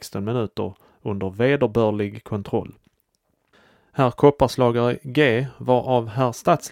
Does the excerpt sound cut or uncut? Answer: uncut